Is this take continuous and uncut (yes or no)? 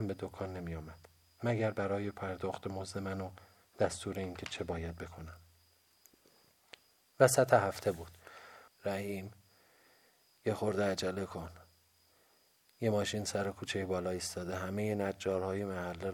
no